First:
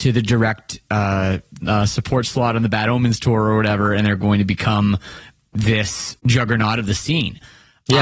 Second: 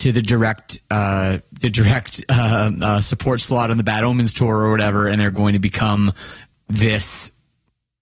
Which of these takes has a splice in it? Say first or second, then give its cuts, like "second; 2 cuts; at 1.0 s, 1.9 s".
first; 2 cuts; at 1.6 s, 6.2 s